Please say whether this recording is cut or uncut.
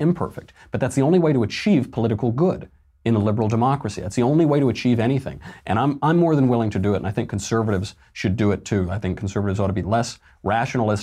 uncut